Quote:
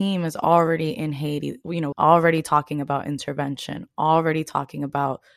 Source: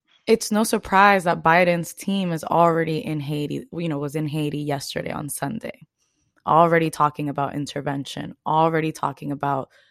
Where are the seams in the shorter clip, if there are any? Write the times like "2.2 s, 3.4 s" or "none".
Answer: 1.9 s